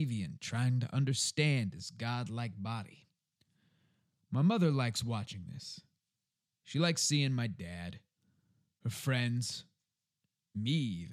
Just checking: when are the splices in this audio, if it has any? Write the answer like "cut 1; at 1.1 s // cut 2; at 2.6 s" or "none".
none